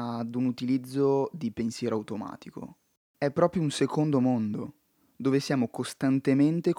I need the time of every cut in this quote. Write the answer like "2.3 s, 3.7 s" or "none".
3.1 s

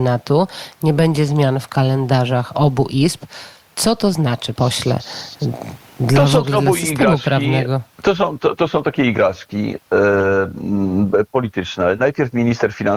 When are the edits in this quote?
4.5 s, 7.9 s

